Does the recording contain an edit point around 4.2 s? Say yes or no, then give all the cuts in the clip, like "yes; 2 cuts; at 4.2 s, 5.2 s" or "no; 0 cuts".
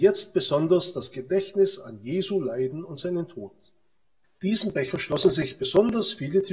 yes; 1 cut; at 4.2 s